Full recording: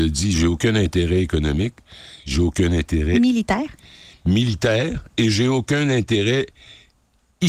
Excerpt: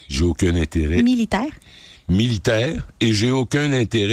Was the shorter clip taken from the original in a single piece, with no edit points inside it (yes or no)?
yes